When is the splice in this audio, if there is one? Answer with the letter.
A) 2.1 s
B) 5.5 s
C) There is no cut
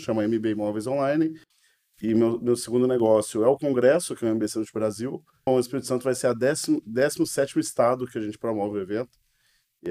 B